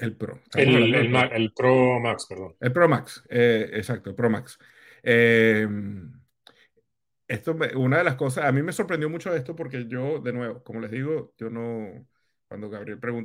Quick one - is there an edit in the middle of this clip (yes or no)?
no